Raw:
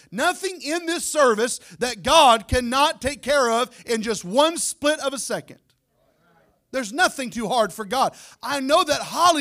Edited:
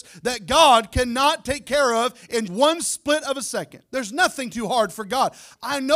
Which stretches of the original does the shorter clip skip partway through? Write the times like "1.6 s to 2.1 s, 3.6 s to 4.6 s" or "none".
4.0 s to 4.2 s, 5.6 s to 6.7 s